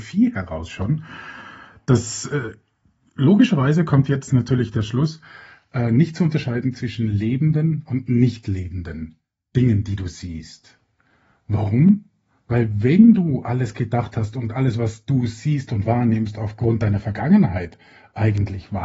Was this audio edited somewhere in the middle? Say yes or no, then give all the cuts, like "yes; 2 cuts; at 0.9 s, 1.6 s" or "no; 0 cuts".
no; 0 cuts